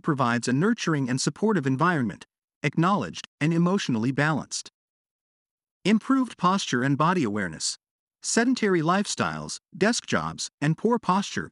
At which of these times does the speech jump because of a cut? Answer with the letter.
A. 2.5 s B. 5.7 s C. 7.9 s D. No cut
A